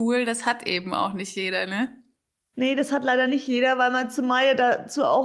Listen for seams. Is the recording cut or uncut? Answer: uncut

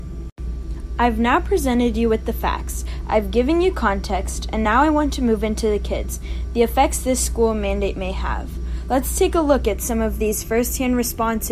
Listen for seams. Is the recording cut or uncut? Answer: uncut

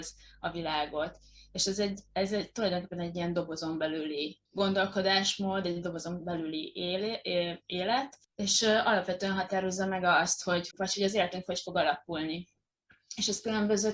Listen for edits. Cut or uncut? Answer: cut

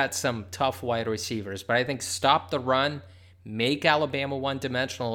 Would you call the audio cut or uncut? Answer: uncut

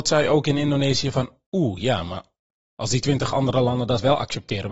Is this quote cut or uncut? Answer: uncut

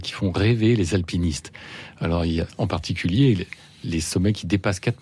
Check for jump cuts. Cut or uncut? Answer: cut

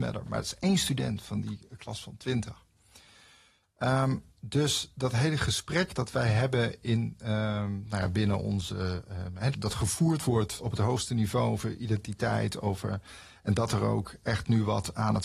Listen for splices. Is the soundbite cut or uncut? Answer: cut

